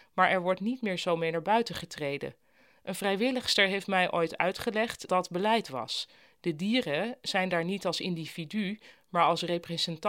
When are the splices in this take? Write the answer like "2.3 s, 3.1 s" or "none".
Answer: 5.1 s